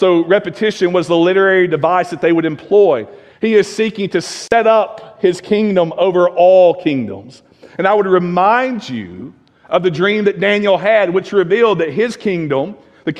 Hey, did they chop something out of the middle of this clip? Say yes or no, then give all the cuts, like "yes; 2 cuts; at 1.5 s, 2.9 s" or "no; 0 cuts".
yes; 1 cut; at 3.3 s